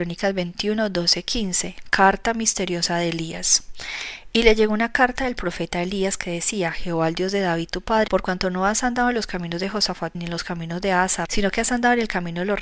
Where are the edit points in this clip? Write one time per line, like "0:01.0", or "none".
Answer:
0:08.1
0:10.1
0:11.3